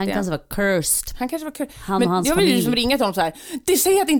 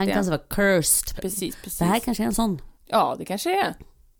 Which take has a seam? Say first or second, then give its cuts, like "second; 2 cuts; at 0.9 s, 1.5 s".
second; 2 cuts; at 1.2 s, 2.8 s